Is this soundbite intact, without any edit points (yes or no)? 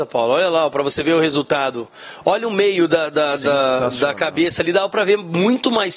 yes